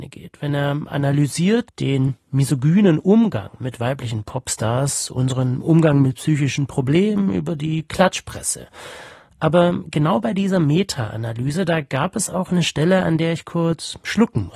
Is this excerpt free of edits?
no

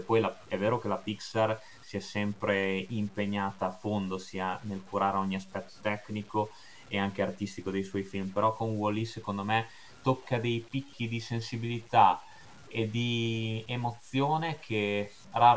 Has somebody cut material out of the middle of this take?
no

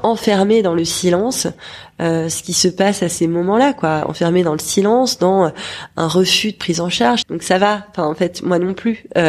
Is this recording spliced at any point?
yes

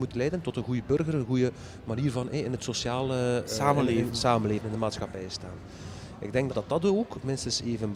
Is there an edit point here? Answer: yes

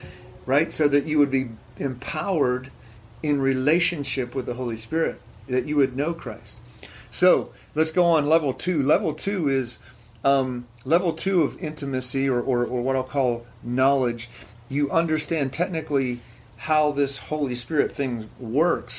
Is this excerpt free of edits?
yes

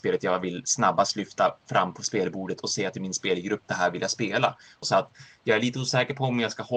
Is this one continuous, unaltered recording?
no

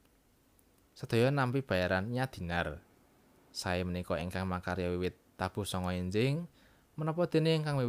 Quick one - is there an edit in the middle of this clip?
no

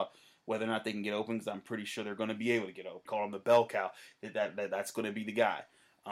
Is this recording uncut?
no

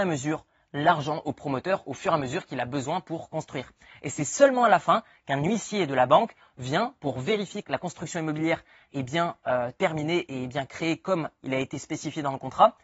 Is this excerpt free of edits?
no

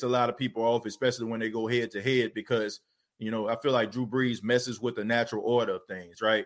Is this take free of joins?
yes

